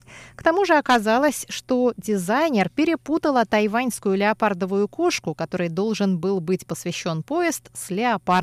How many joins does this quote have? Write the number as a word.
zero